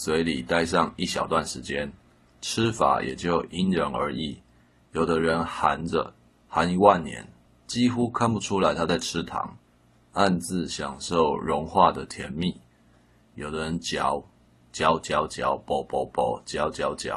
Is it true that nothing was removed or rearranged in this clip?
yes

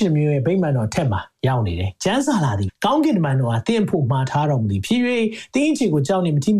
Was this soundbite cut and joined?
yes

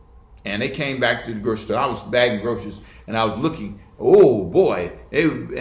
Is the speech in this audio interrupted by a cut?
no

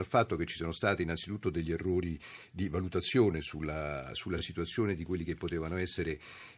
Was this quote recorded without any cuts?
yes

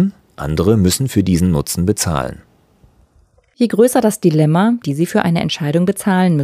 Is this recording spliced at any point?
yes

